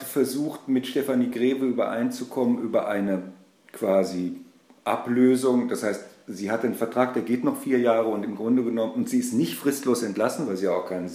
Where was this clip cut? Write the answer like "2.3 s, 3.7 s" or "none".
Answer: none